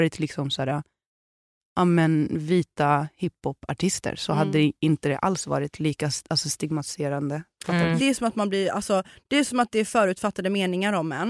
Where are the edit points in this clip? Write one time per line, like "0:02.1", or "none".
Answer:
0:08.0